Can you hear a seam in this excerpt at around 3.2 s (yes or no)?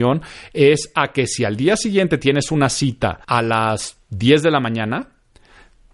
yes